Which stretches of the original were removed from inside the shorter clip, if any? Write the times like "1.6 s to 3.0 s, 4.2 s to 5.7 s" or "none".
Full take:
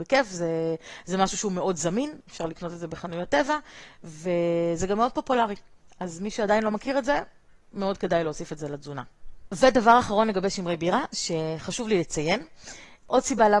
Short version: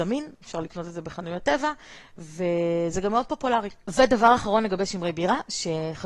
5.7 s to 9.5 s

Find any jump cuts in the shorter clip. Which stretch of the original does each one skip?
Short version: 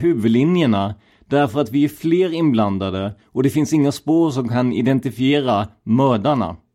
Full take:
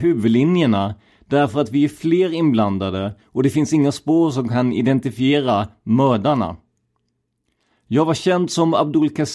none

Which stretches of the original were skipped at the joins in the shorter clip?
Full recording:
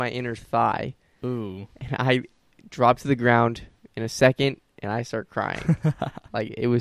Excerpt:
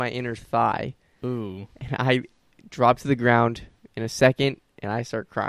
none

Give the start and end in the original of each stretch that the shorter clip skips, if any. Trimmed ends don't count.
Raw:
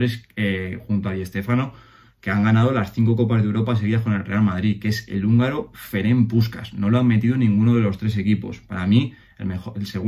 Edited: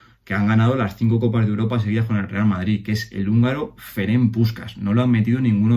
none

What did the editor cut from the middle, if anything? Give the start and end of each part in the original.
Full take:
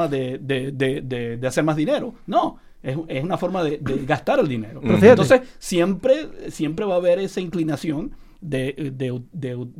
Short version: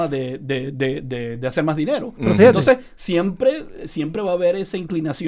2.2 s to 4.8 s

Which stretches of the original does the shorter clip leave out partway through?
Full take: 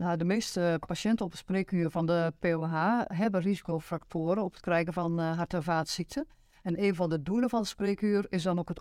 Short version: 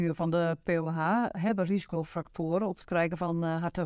none

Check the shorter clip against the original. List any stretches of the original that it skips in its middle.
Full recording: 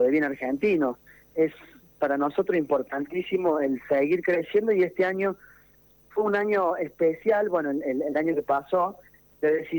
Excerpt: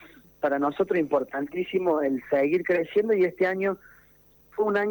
none

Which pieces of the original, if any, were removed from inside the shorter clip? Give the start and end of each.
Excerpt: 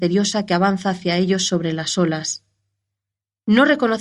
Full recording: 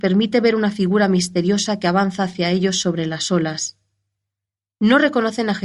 none

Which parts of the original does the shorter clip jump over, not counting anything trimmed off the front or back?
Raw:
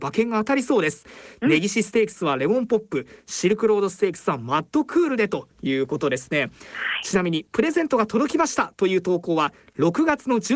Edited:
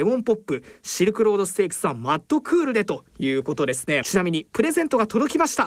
6.5 s to 7.0 s

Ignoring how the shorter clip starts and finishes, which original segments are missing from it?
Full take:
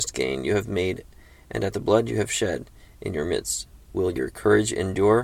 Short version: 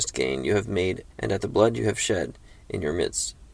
1.1 s to 1.4 s

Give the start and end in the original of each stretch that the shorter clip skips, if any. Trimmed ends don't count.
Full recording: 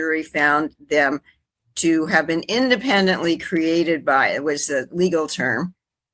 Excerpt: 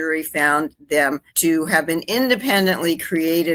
1.3 s to 1.7 s

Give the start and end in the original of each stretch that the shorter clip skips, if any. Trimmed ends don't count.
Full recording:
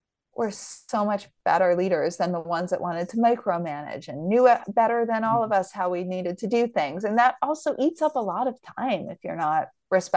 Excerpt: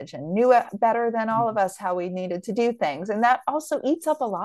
none

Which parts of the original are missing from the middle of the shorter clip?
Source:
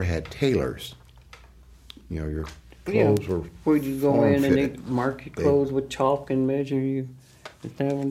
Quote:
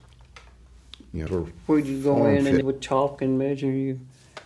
2.2 s to 3.2 s, 4.6 s to 5.7 s

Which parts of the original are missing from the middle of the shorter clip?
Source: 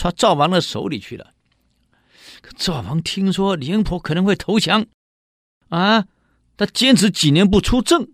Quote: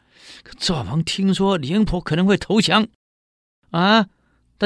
none

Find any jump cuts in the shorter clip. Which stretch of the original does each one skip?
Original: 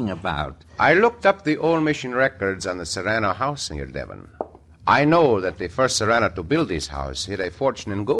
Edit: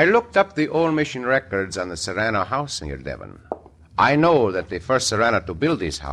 none

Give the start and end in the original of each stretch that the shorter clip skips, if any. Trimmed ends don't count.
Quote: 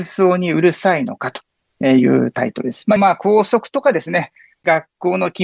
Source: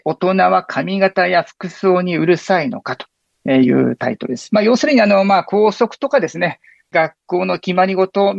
4.6 s to 5.2 s

